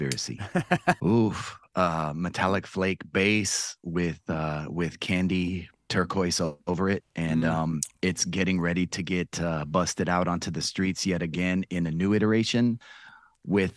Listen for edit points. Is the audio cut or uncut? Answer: cut